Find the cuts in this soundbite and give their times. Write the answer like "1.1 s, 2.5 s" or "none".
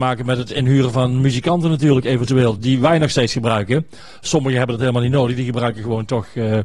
none